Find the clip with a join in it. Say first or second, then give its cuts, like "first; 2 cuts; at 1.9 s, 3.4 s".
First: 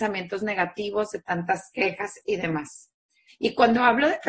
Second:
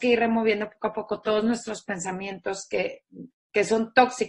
first; 1 cut; at 3.3 s